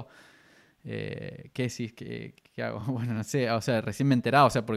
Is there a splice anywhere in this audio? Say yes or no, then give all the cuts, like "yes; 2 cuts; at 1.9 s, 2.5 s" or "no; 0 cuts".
no; 0 cuts